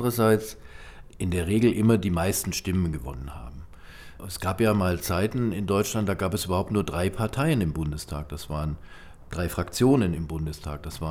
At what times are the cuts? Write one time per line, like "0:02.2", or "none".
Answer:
none